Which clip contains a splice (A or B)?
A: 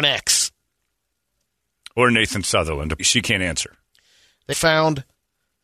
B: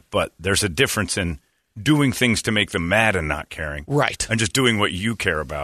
A